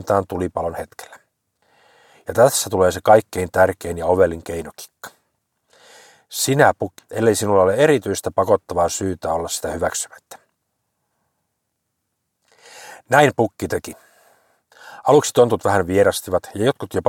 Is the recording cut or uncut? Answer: cut